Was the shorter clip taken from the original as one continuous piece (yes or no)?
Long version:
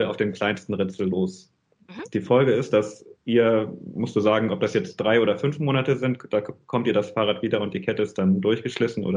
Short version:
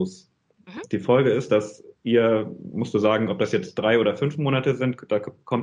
yes